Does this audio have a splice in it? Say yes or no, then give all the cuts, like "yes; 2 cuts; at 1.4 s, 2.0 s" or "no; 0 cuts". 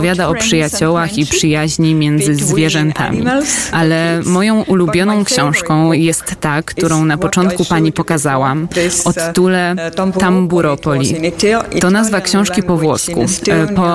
yes; 1 cut; at 3.7 s